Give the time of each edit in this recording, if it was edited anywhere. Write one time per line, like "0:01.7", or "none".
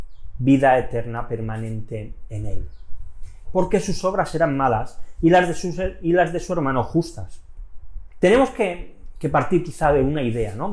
0:03.4
0:08.2

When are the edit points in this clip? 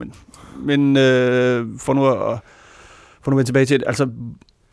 none

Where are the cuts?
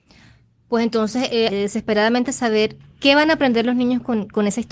0:01.5

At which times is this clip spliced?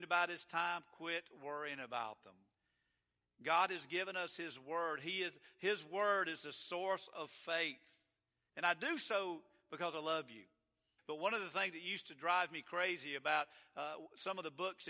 0:08.5
0:11.0

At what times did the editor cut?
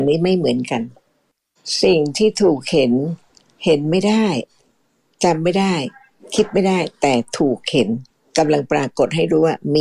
none

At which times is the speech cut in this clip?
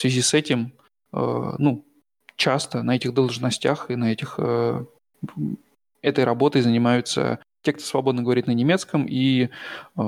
none

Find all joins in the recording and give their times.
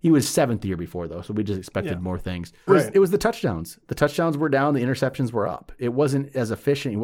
0:02.7

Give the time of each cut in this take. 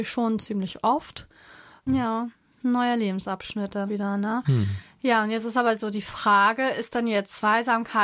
0:01.9
0:03.9

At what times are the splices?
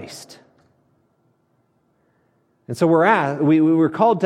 none

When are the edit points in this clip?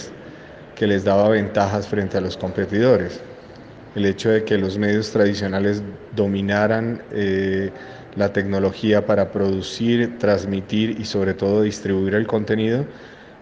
0:03.9

